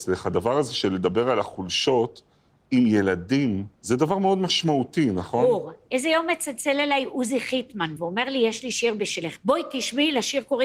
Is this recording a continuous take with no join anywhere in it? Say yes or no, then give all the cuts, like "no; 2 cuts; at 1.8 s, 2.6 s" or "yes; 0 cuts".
no; 1 cut; at 3.7 s